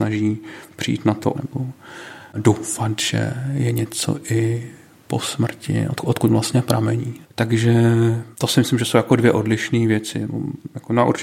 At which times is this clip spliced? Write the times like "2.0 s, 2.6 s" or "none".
1.3 s, 7.2 s, 8.3 s

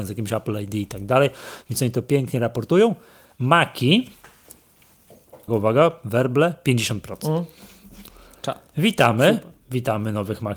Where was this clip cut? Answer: 5.5 s

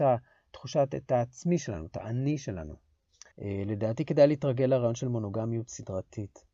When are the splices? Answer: 3.3 s

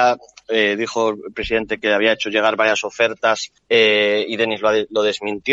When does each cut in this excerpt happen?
3.6 s

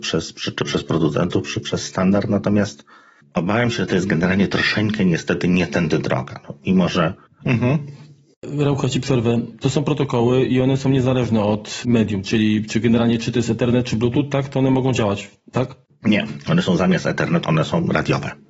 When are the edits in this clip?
17.4 s

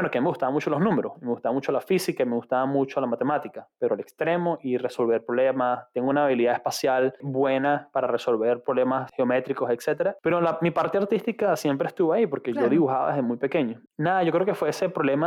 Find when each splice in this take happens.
none

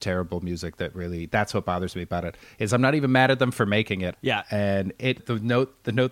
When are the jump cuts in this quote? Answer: 4.1 s, 5.2 s

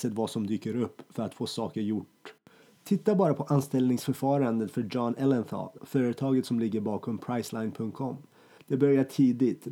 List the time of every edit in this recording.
5.8 s, 8.6 s

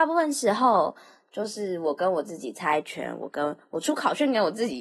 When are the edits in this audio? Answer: none

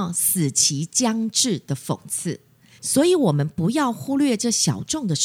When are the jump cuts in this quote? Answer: 2.8 s

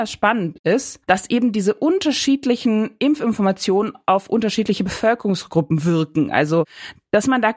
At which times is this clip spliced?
1.0 s

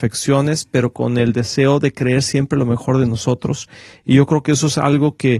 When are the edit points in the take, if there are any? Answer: none

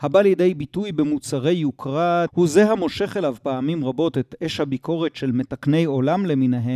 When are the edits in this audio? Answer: 2.3 s

